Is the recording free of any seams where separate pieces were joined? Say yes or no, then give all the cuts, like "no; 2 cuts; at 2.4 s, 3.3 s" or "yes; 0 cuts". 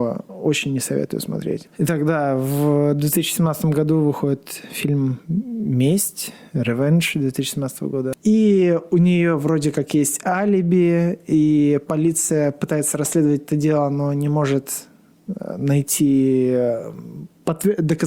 no; 2 cuts; at 1.7 s, 8.1 s